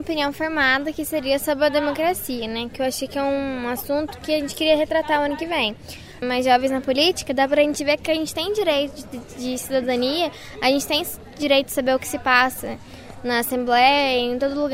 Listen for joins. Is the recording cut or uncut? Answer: cut